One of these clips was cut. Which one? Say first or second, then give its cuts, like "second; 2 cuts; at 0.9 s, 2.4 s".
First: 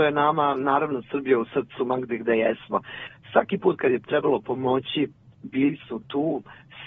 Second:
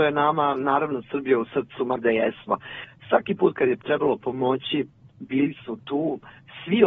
second; 1 cut; at 2.0 s